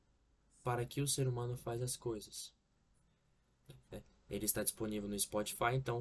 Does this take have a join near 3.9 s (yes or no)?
yes